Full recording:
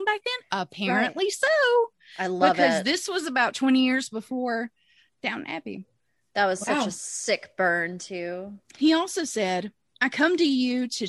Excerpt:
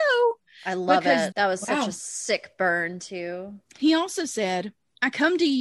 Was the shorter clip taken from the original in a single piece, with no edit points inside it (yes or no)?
no